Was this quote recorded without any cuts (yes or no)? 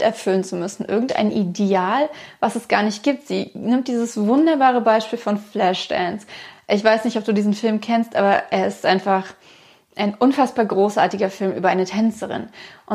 yes